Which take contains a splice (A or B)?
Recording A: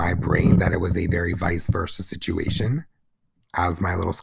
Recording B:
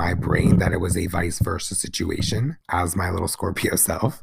B